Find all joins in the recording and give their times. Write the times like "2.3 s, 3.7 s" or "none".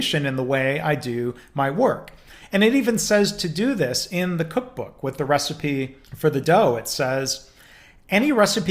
6.0 s